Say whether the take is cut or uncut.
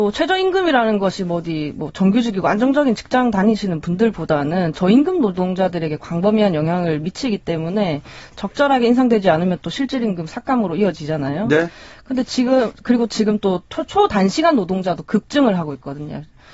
uncut